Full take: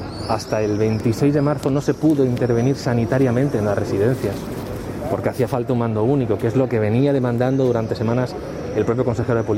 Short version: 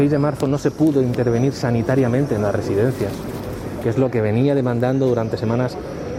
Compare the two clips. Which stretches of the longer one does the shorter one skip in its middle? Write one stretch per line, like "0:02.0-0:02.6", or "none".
0:05.0-0:06.4